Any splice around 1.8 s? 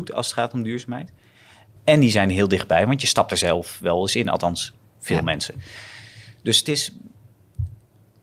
yes; 1 cut; at 1.8 s

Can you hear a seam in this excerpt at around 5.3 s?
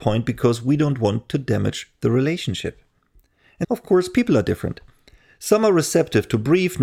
no; 1 cut; at 3.6 s

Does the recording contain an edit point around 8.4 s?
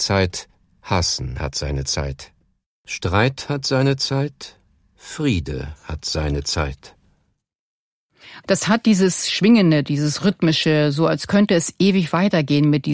yes; 1 cut; at 8.4 s

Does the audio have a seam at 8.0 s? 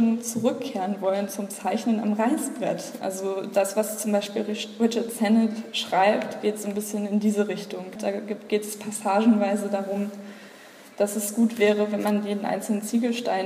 yes; 2 cuts; at 3.0 s, 8.0 s

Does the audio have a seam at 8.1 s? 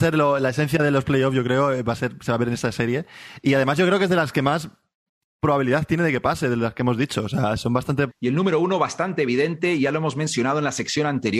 yes; 1 cut; at 8.1 s

